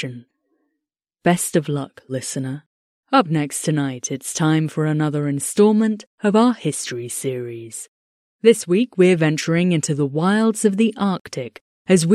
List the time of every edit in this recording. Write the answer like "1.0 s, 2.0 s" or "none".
3.0 s